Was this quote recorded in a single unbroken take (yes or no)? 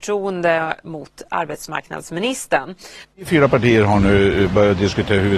no